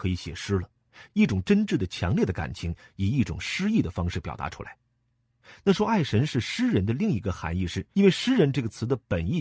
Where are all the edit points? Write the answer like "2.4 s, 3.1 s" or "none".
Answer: 7.9 s